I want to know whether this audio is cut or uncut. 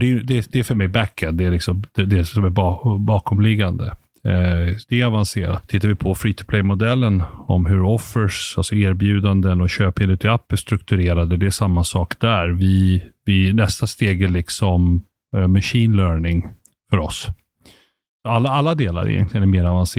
uncut